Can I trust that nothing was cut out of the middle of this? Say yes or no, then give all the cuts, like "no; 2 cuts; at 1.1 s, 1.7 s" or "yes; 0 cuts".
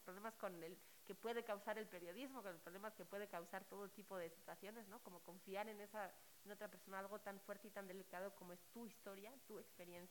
yes; 0 cuts